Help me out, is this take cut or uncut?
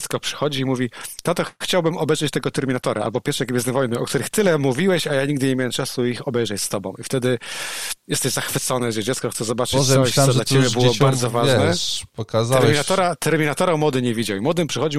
uncut